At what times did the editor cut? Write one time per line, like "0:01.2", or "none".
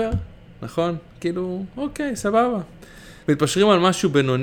0:01.1
0:03.2